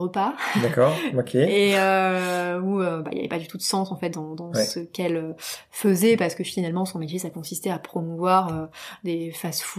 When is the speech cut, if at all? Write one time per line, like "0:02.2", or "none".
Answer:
none